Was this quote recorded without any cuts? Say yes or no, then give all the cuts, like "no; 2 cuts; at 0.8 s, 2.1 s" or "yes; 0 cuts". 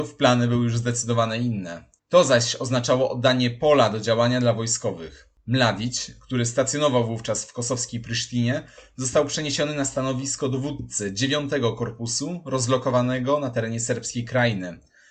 yes; 0 cuts